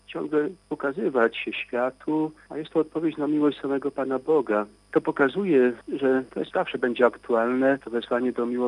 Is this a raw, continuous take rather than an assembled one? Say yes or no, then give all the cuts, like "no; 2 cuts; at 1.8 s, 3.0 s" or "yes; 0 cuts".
no; 1 cut; at 4.9 s